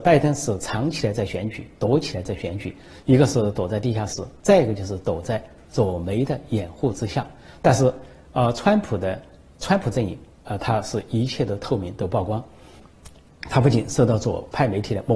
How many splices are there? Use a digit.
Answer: 0